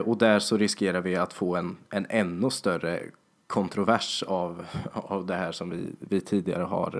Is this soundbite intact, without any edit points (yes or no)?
yes